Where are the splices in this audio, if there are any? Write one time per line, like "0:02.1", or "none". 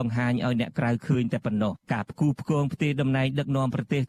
0:01.8

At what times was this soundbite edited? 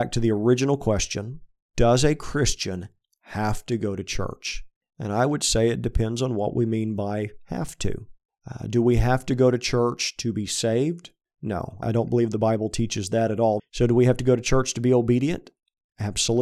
0:11.8
0:13.6

